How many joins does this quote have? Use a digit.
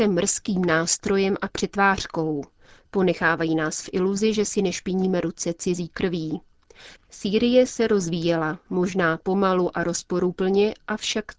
1